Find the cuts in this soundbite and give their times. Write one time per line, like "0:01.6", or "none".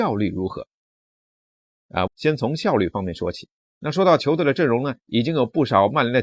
0:02.1
0:03.7